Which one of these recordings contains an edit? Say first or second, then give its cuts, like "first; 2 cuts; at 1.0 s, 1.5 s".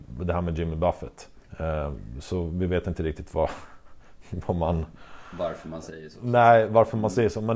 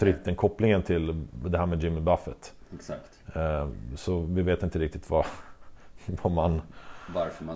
first; 1 cut; at 1.4 s